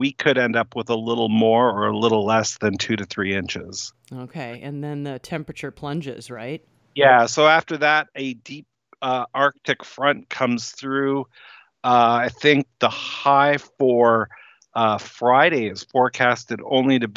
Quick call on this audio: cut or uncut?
uncut